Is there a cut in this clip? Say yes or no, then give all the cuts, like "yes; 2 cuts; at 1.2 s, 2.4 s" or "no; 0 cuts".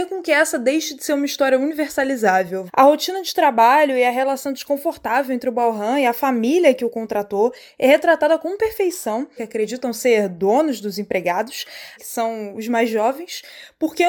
yes; 3 cuts; at 2.7 s, 9.4 s, 12.0 s